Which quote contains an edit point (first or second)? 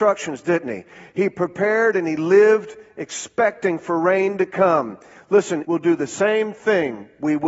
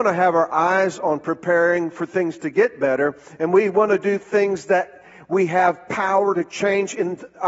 first